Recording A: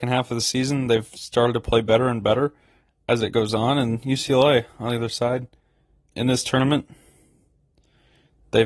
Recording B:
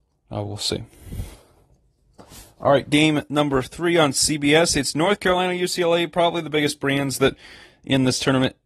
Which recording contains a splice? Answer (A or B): A